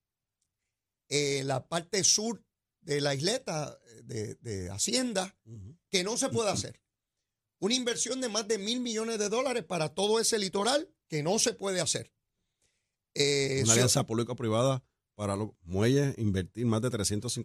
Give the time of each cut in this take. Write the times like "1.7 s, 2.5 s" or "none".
none